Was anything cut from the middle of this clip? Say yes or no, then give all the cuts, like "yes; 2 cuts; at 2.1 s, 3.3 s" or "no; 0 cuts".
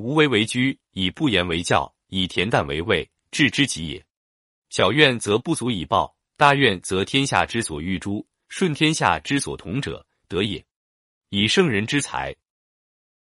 no; 0 cuts